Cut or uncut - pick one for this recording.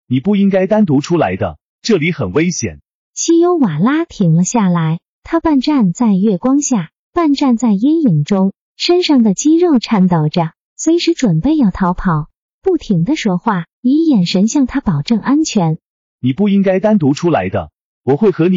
cut